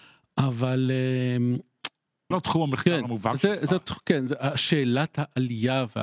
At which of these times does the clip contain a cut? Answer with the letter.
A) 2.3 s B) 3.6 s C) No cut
A